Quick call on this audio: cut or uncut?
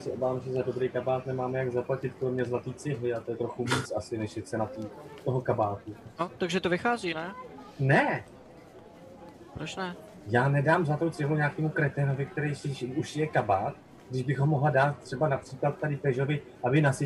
uncut